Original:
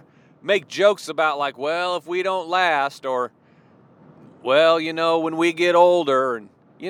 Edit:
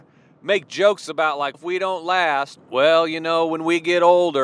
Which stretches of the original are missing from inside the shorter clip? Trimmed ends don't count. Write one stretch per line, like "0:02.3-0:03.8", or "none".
0:01.5-0:02.0
0:03.0-0:04.3